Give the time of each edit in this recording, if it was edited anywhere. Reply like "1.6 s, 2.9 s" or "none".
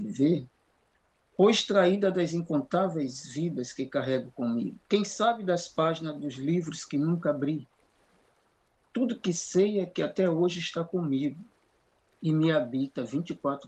4.8 s